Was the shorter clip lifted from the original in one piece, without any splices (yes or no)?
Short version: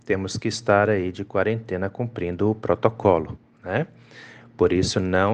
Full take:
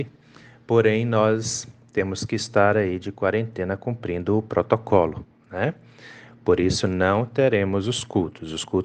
yes